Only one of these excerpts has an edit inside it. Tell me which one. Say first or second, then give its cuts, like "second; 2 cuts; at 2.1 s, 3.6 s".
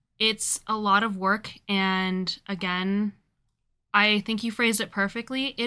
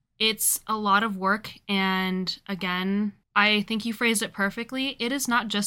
second; 1 cut; at 3.2 s